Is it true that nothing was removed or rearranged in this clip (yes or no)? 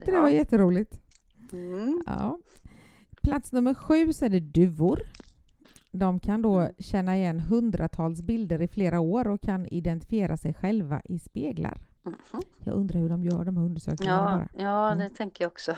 no